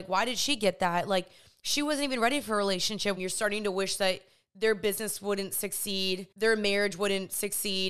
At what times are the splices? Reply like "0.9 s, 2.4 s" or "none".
3.2 s, 6.3 s